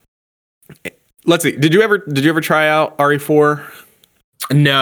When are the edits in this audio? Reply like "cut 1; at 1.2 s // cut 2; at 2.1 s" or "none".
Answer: none